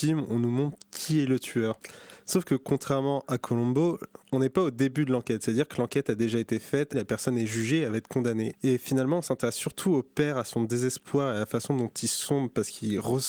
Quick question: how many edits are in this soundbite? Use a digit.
3